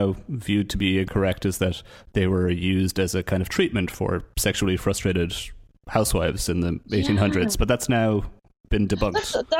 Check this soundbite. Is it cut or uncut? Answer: uncut